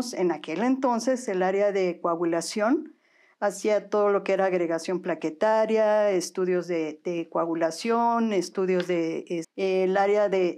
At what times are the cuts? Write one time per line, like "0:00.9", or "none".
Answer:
0:09.4